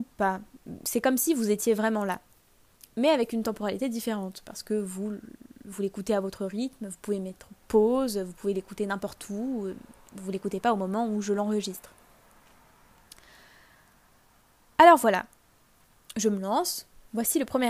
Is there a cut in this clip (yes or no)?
no